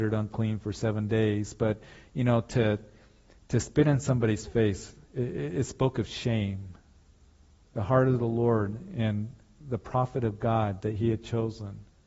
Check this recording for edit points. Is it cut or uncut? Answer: cut